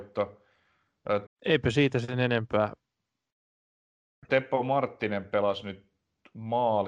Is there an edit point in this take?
yes; 2 cuts; at 1.3 s, 4.3 s

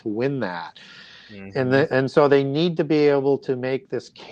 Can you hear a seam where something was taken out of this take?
no; 0 cuts

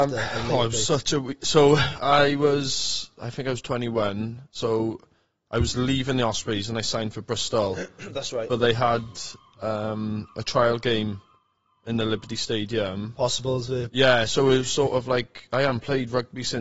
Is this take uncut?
yes; 0 cuts

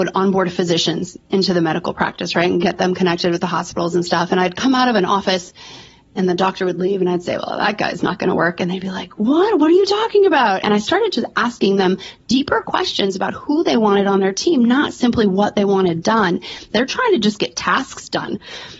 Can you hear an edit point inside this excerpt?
yes; 2 cuts; at 10.6 s, 16.7 s

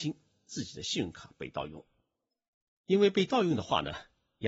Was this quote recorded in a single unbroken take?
yes; 0 cuts

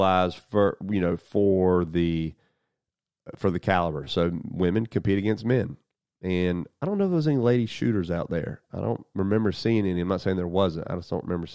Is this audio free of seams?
yes; 0 cuts

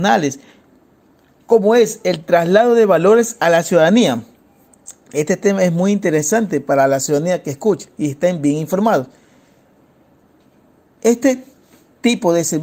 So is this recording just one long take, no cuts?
yes; 0 cuts

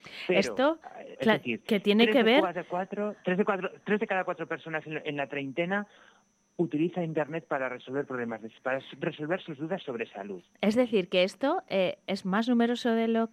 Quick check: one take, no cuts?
no; 1 cut; at 1.2 s

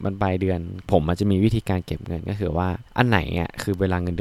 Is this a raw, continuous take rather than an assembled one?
no; 1 cut; at 2.9 s

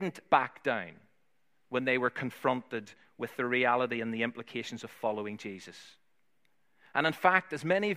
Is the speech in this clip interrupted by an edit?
no; 0 cuts

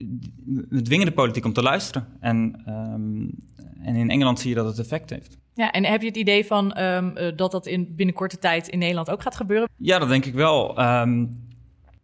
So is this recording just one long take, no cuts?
no; 1 cut; at 9.7 s

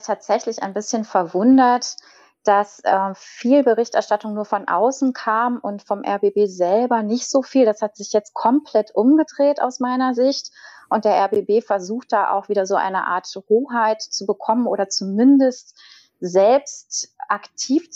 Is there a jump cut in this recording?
no; 0 cuts

